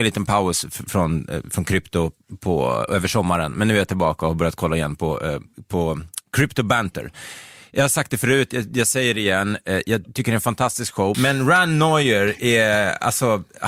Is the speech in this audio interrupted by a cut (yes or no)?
yes